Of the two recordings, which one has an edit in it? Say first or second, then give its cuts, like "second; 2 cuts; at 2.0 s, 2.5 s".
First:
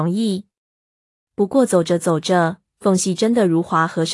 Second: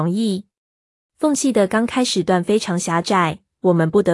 second; 1 cut; at 1.1 s